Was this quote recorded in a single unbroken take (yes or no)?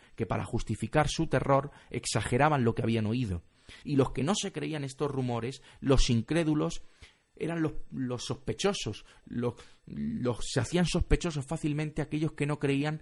no